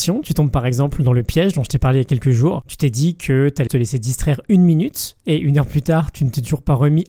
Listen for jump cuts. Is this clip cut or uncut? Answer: cut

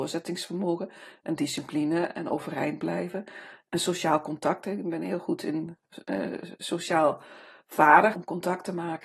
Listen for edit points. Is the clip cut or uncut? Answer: cut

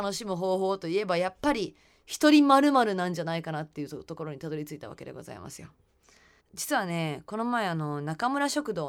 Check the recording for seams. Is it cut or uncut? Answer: cut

